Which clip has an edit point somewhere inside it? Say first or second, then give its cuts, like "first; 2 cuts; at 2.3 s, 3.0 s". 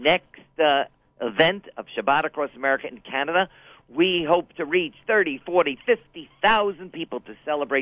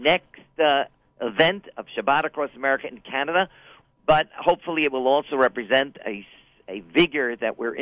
second; 1 cut; at 3.8 s